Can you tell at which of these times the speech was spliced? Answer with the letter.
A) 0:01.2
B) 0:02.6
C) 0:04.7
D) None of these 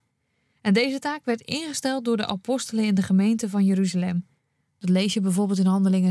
D